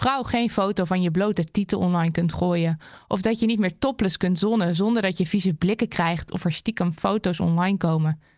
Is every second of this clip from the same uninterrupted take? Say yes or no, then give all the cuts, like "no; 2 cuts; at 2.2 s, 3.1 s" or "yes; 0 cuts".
yes; 0 cuts